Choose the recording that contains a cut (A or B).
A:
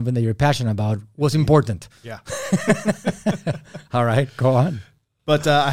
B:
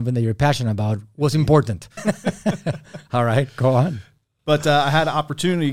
B